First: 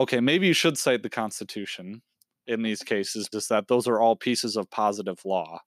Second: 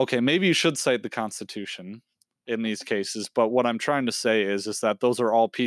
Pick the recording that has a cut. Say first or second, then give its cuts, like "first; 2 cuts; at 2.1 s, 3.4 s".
first; 1 cut; at 3.3 s